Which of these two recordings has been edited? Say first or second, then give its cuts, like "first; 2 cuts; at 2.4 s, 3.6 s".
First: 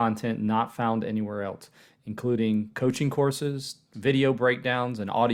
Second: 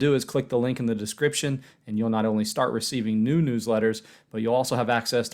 first; 1 cut; at 3.9 s